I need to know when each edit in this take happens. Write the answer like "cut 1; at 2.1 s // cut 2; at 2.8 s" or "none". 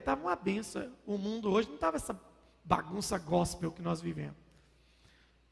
none